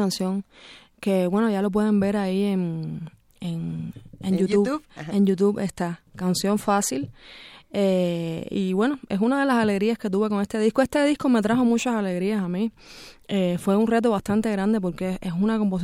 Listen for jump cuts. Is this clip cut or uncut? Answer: uncut